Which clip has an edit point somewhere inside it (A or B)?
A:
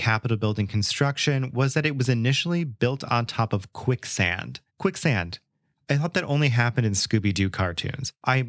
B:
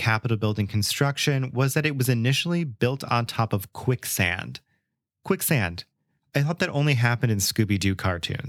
A